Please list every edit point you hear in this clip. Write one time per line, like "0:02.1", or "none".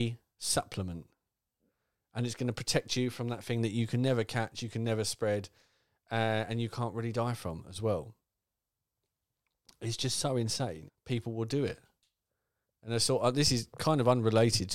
0:10.9